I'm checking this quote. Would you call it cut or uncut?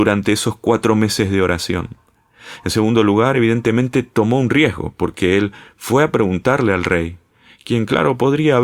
uncut